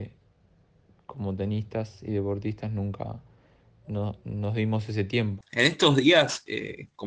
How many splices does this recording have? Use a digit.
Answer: 1